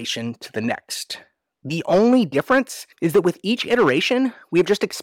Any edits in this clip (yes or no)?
yes